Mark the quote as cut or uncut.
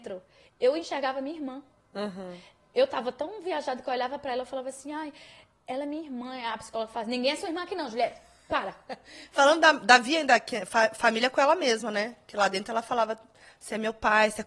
uncut